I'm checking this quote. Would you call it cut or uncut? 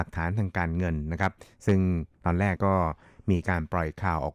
cut